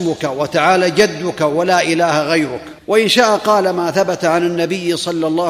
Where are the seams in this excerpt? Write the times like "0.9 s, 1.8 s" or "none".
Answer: 2.8 s